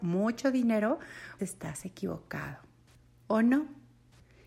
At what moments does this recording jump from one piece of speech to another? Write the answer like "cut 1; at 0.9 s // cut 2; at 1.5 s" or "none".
cut 1; at 1.4 s